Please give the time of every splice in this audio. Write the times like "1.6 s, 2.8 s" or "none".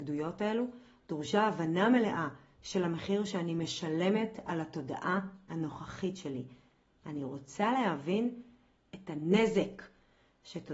none